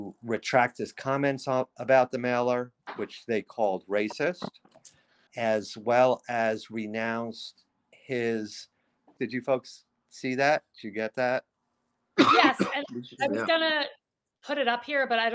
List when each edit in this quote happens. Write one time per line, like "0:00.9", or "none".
0:05.3
0:09.2

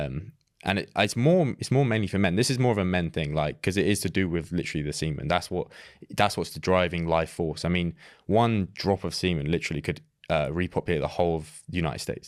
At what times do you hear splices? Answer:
none

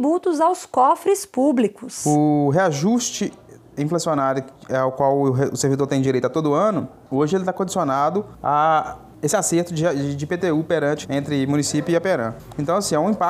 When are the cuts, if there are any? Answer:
0:11.0

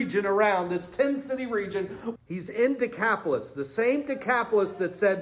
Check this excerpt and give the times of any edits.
0:02.2

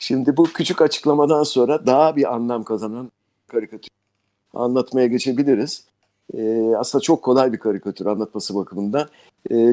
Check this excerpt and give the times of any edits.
none

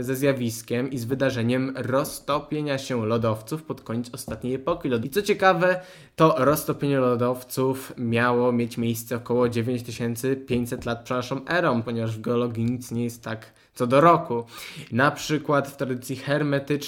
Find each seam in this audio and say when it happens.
0:05.0
0:11.8
0:14.9

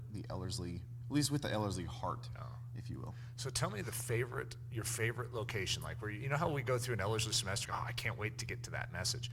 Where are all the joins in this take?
0:07.6

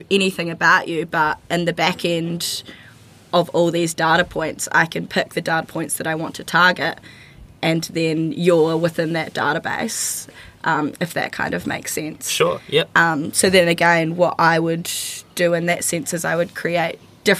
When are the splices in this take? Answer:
none

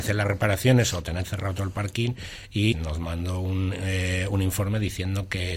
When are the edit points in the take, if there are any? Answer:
0:02.7

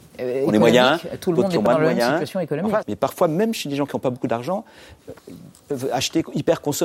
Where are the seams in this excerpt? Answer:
0:02.8

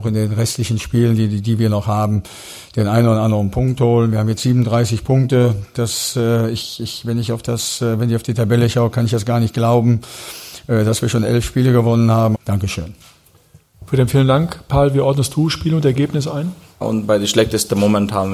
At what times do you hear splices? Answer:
0:12.3
0:16.8

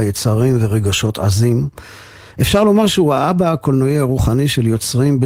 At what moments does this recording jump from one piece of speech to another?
none

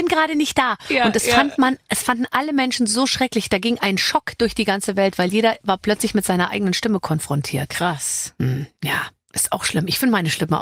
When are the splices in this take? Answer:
none

